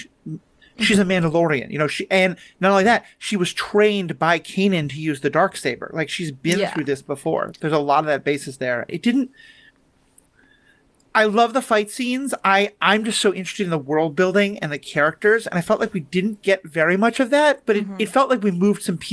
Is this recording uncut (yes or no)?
no